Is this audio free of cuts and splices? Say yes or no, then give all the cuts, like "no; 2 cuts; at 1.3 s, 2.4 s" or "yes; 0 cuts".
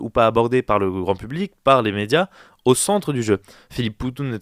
yes; 0 cuts